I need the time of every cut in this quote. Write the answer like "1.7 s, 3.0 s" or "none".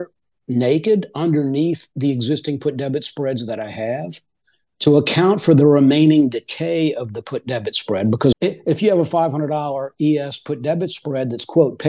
8.3 s

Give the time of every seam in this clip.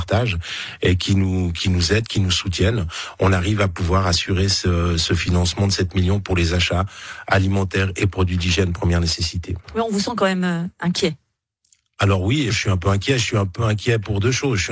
12.5 s

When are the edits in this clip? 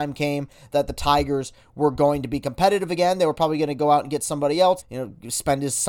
4.8 s

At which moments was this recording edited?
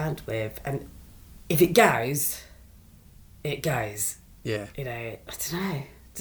none

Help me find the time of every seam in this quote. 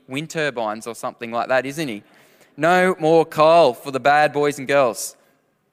none

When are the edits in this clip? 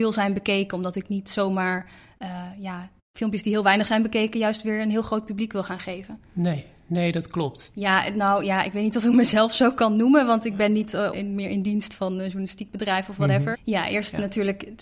7.7 s, 11.1 s, 13.5 s

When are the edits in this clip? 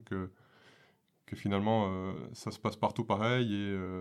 none

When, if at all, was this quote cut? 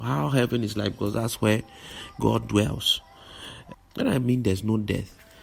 3.7 s

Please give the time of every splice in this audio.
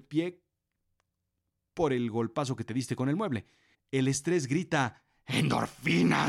3.7 s

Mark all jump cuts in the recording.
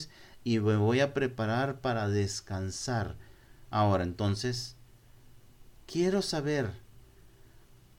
3.7 s, 5.7 s

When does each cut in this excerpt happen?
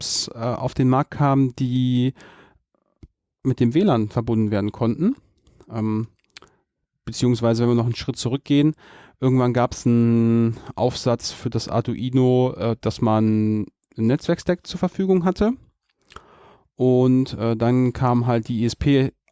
none

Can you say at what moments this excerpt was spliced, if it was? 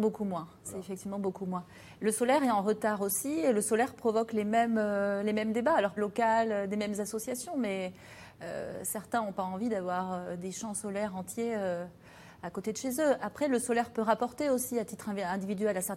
6.0 s

